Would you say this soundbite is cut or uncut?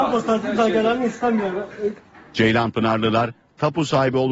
uncut